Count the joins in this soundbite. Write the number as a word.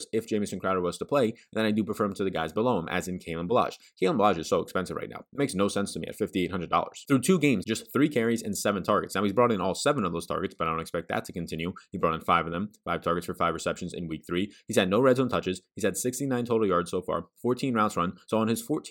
one